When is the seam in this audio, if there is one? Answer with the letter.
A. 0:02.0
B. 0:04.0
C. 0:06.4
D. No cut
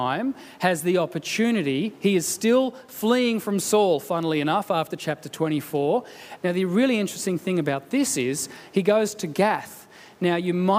C